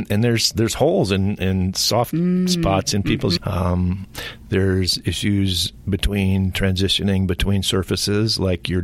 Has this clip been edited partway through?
yes; 1 cut; at 3.4 s

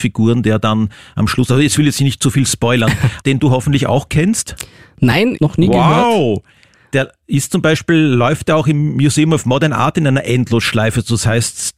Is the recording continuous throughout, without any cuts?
no; 2 cuts; at 3.2 s, 5.4 s

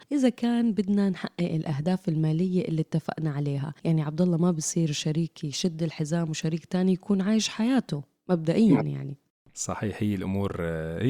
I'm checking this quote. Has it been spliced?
no; 0 cuts

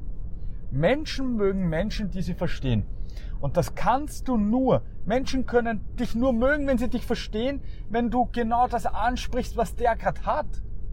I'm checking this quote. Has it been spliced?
no; 0 cuts

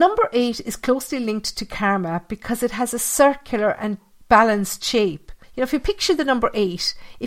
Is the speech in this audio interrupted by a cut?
yes; 1 cut; at 5.4 s

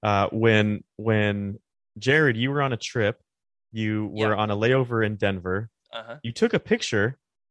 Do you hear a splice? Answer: no; 0 cuts

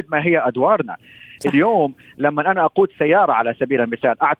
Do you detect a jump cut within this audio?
no; 0 cuts

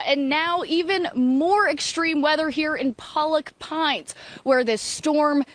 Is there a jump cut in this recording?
no; 0 cuts

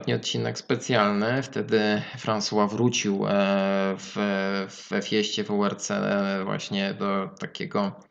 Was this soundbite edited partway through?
no; 0 cuts

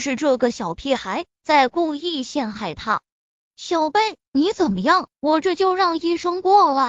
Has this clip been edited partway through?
yes; 1 cut; at 5.1 s

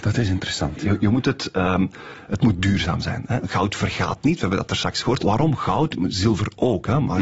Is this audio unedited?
no; 1 cut; at 5.2 s

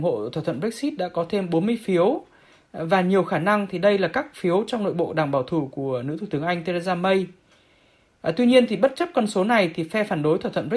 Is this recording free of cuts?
yes; 0 cuts

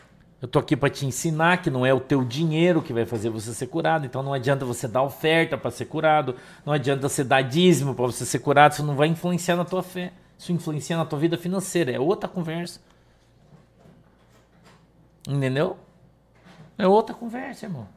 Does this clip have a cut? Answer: no; 0 cuts

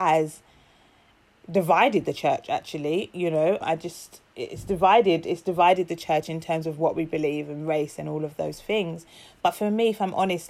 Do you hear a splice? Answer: yes; 1 cut; at 3.6 s

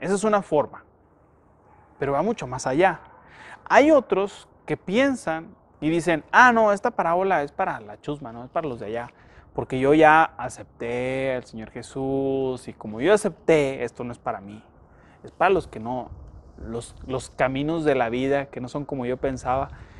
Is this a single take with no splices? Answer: yes; 0 cuts

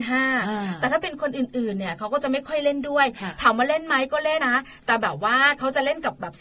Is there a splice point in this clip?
yes; 1 cut; at 4.4 s

